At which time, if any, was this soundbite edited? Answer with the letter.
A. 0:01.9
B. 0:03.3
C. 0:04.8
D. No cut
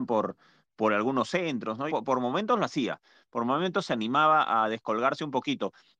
A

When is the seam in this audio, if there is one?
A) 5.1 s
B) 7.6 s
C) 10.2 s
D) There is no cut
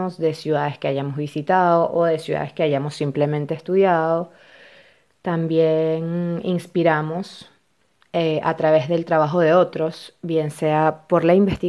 D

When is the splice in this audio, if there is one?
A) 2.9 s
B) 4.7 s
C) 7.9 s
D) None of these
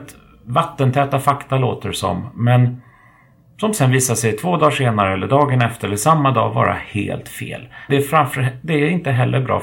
C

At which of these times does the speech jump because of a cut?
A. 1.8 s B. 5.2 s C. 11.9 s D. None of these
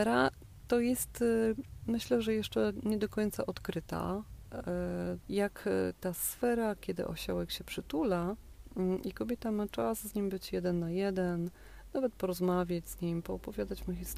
B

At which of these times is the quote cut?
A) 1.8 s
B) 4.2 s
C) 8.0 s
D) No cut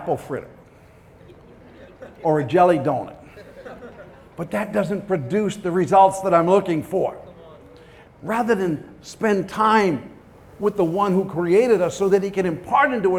C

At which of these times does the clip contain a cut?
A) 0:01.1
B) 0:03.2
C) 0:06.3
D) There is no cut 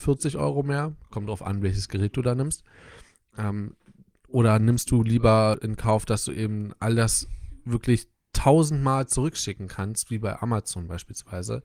D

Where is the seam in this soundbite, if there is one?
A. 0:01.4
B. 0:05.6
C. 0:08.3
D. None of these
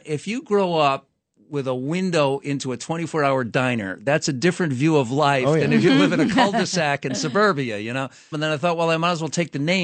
C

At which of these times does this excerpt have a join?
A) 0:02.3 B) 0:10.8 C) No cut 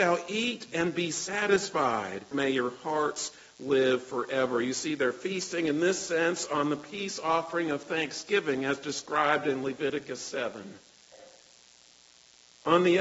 A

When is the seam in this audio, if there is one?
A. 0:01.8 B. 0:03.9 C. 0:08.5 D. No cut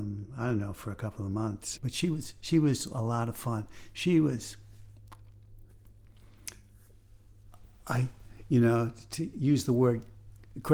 A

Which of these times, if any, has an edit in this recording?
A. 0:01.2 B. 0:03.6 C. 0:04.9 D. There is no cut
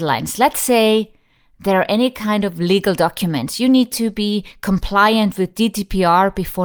D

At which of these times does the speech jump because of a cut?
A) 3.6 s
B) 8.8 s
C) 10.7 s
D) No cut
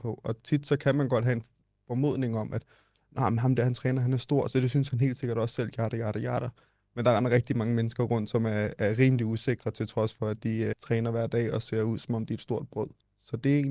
C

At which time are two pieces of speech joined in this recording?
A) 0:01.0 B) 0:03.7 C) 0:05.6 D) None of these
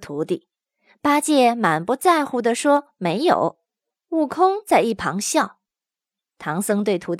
B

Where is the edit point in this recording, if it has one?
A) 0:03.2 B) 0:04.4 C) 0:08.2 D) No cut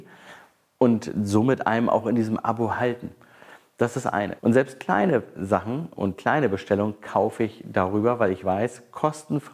B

